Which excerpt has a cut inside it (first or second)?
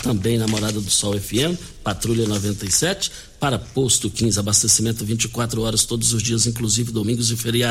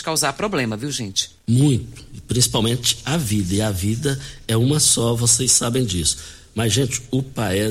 second